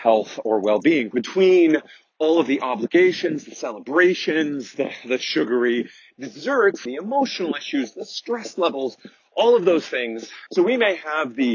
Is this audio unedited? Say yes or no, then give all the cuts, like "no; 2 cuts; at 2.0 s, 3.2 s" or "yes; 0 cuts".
no; 3 cuts; at 1.1 s, 6.9 s, 10.5 s